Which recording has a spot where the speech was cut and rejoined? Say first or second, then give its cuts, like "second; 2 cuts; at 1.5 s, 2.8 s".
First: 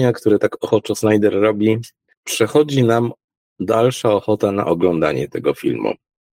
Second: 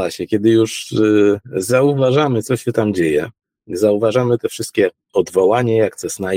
first; 1 cut; at 2.1 s